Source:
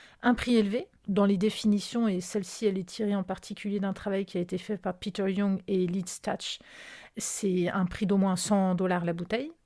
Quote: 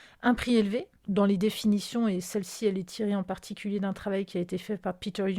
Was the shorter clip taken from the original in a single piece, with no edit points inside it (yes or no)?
yes